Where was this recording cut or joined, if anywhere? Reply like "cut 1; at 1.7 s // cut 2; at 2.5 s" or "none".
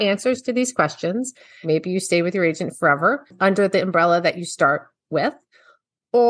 cut 1; at 1.6 s